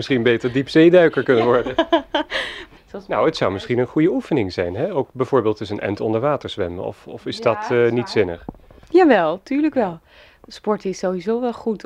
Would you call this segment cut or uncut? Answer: cut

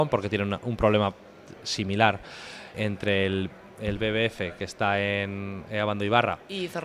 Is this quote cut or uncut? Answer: cut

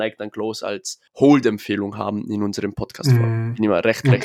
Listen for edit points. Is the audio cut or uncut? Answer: cut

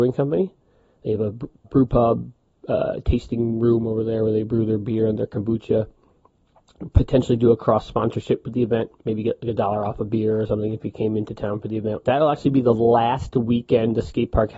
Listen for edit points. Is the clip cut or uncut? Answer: cut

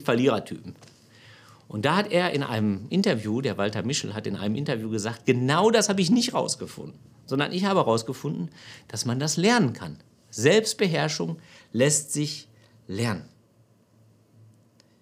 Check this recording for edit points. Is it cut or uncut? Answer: uncut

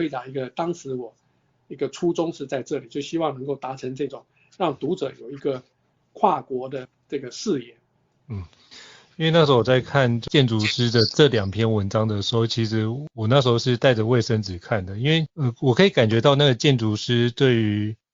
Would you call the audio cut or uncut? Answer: uncut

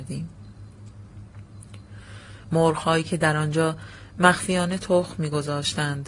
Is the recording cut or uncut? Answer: cut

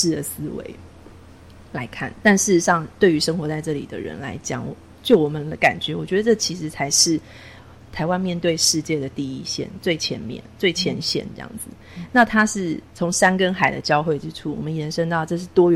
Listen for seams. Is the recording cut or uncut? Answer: uncut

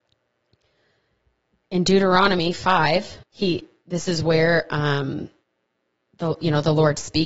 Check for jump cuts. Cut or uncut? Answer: cut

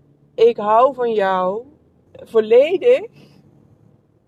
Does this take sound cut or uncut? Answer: cut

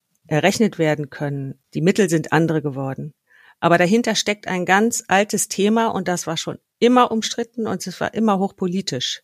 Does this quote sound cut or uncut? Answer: uncut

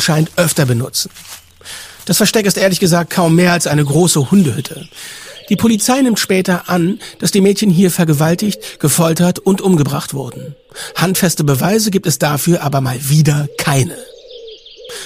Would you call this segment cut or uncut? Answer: uncut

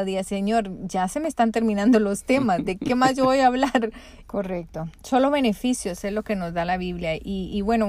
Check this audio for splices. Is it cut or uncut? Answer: cut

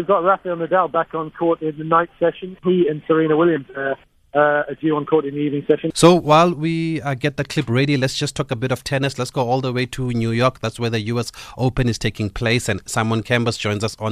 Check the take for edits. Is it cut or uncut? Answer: cut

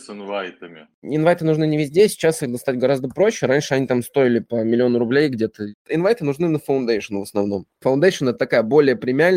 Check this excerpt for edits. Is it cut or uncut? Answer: uncut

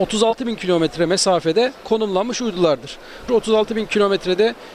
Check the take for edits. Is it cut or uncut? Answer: cut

